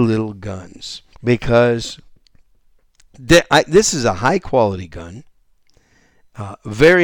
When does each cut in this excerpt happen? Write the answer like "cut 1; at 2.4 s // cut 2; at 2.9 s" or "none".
cut 1; at 1.1 s